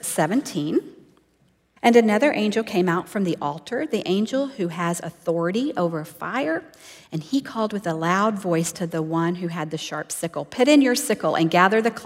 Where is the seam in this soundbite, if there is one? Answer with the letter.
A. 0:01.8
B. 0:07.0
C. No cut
A